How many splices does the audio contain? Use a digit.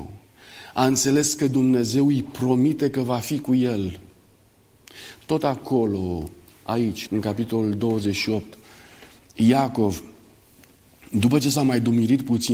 1